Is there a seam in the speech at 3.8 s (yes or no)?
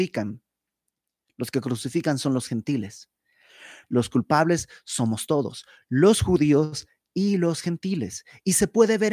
yes